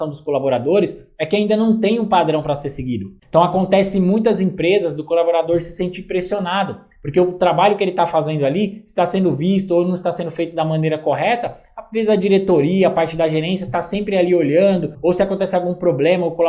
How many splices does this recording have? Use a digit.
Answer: 1